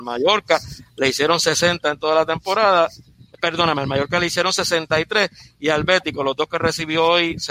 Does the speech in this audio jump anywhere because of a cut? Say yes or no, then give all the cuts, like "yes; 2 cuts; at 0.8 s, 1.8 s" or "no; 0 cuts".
no; 0 cuts